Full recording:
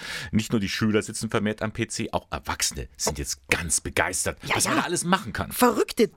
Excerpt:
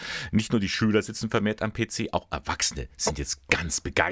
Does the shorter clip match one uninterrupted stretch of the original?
yes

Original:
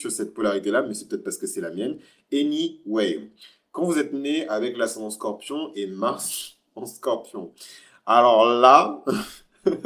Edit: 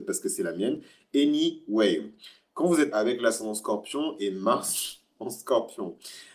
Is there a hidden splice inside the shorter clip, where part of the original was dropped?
yes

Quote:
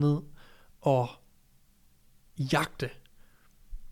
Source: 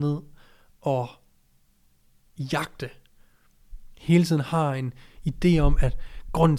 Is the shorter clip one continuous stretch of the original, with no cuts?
yes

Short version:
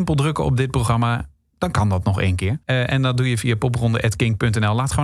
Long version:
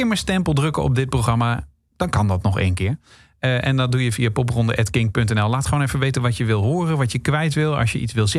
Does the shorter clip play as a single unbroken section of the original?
no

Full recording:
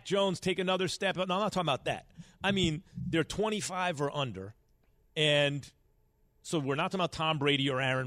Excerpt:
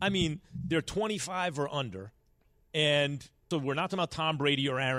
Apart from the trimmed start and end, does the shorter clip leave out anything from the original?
yes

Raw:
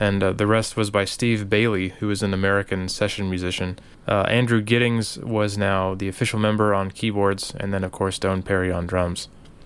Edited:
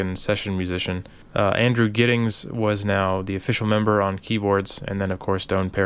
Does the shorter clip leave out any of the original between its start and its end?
no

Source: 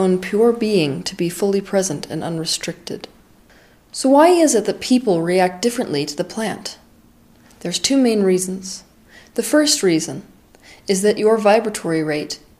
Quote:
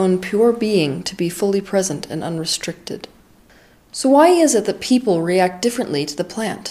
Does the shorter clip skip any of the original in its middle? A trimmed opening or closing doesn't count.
no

